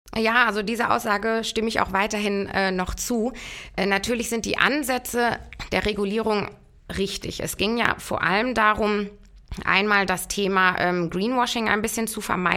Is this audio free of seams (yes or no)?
yes